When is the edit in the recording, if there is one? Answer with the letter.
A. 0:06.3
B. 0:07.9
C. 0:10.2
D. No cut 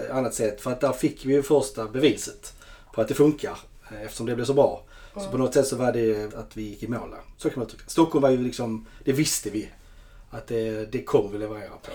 A